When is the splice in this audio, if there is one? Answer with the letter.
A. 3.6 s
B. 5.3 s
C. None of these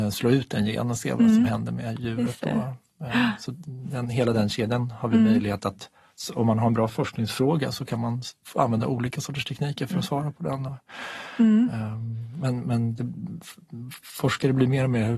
A